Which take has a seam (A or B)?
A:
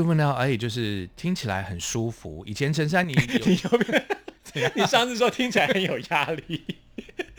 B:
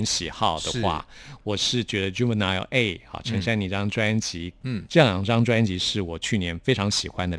B